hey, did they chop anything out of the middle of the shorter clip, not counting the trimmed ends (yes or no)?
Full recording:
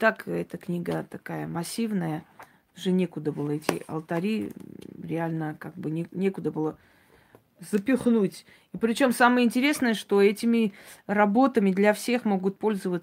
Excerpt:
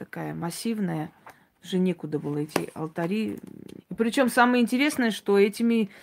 yes